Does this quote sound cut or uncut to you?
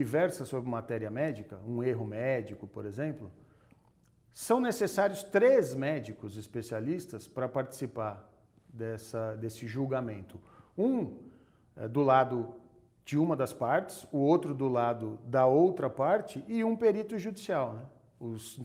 uncut